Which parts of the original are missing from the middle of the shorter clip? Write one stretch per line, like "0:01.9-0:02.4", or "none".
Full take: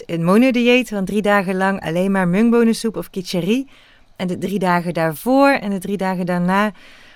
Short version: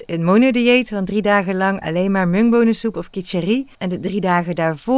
0:03.7-0:04.1